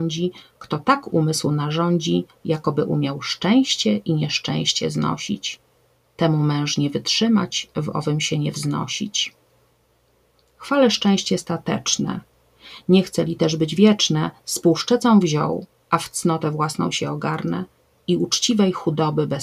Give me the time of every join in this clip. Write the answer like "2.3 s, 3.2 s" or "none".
none